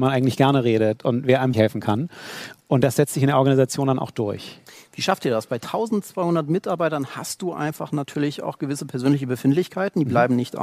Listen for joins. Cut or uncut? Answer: cut